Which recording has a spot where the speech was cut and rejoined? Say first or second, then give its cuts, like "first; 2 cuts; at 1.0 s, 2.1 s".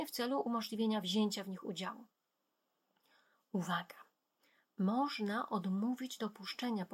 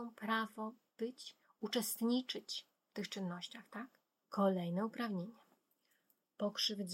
second; 1 cut; at 4.2 s